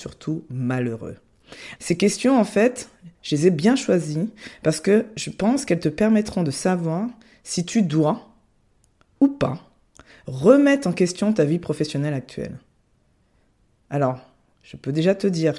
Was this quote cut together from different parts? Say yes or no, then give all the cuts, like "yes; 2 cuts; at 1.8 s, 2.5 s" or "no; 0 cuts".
yes; 1 cut; at 1.8 s